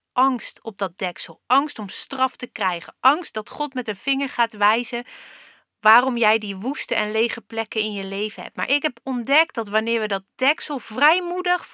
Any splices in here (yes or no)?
no